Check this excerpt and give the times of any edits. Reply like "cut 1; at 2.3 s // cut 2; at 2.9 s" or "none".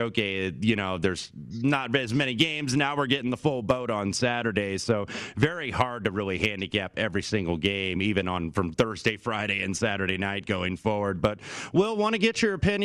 none